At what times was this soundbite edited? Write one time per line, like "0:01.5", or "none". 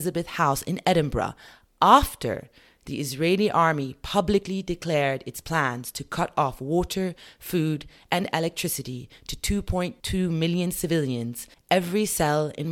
0:11.5